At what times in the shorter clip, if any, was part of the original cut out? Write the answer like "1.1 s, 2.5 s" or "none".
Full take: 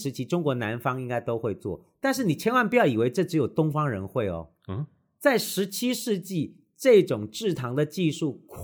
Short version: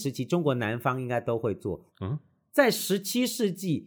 1.9 s